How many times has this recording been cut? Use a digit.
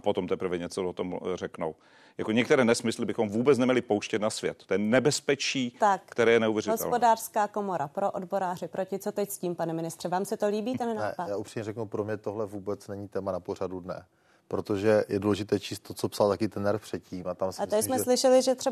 0